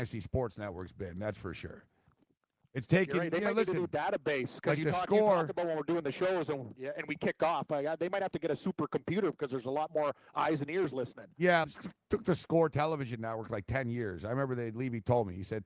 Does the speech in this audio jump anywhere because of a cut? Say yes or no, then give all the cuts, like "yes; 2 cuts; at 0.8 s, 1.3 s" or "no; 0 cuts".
yes; 1 cut; at 11.6 s